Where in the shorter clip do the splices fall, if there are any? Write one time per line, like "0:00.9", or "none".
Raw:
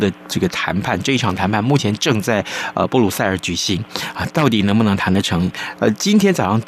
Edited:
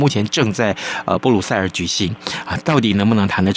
none